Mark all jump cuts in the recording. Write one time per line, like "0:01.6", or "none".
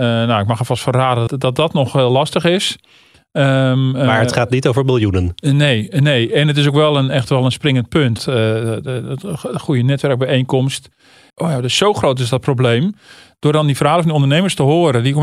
0:01.3
0:08.2
0:11.3